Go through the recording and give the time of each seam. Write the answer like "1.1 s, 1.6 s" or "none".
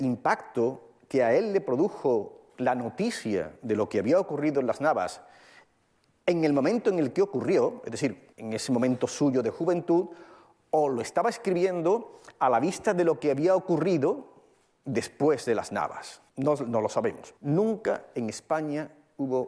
8.3 s, 16.3 s, 17.4 s